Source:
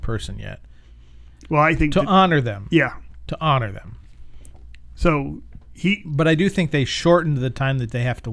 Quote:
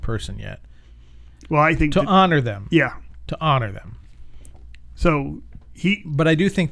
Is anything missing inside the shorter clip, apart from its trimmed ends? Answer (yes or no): no